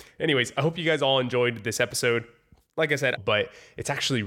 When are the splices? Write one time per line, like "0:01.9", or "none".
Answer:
0:03.2